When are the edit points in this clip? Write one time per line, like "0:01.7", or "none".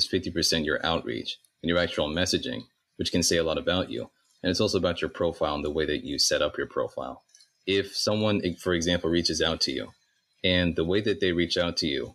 none